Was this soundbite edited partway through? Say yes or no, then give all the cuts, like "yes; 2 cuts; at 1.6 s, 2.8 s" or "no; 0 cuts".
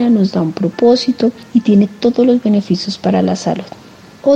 no; 0 cuts